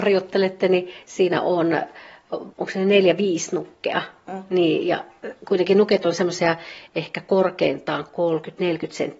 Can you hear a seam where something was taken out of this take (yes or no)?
yes